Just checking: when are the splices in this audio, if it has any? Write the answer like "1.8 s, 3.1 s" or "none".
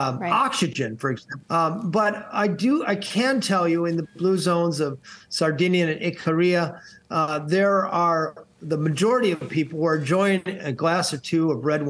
1.4 s